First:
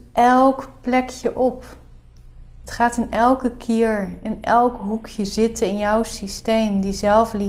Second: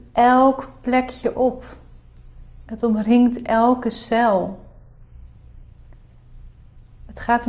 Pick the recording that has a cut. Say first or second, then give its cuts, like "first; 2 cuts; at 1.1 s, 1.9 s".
first; 1 cut; at 2.6 s